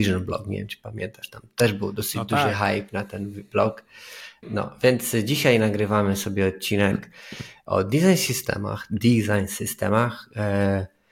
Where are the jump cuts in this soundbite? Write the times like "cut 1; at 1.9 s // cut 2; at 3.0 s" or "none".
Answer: cut 1; at 4.4 s